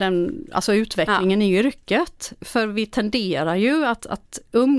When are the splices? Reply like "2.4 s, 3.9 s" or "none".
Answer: none